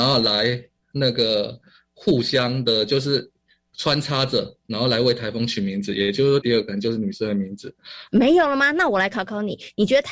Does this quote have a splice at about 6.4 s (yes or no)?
yes